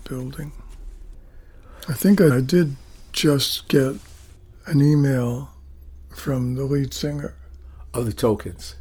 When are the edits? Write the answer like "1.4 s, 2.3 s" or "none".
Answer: 2.3 s